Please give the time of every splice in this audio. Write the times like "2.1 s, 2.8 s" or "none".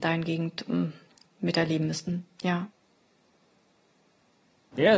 1.3 s